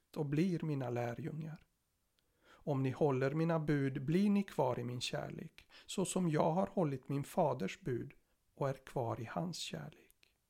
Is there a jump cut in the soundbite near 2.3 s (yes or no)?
yes